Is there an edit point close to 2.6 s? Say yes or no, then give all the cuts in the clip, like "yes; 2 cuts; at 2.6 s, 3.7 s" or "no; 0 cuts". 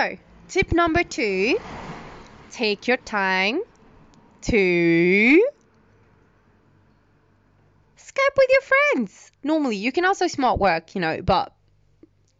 no; 1 cut; at 9.4 s